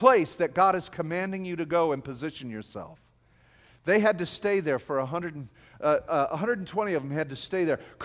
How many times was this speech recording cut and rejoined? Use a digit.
0